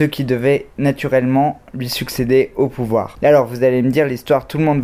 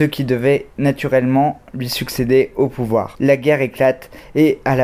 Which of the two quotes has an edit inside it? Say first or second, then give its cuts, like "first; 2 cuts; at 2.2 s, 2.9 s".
first; 1 cut; at 3.2 s